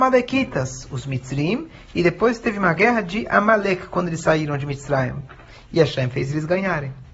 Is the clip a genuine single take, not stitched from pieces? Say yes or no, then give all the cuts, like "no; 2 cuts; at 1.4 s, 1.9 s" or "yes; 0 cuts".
yes; 0 cuts